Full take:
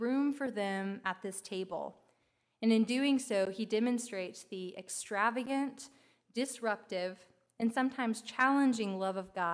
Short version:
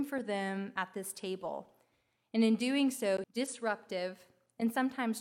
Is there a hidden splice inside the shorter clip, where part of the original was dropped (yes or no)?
yes